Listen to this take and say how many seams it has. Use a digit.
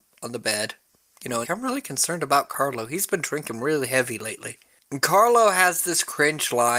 1